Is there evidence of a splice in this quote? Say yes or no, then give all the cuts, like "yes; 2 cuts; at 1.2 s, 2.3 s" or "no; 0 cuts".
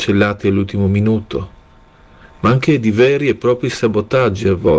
no; 0 cuts